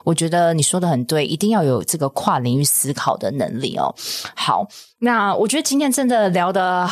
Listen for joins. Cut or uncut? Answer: uncut